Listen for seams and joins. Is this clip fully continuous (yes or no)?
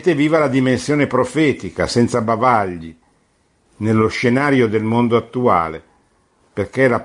yes